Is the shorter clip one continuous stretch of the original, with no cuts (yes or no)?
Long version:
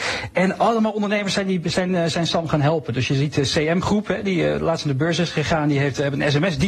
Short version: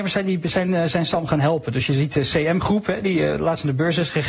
yes